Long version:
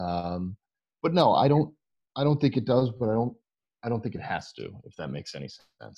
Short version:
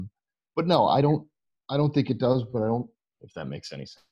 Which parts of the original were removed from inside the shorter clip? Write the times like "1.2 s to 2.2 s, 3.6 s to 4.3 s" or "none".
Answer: 3.7 s to 4.8 s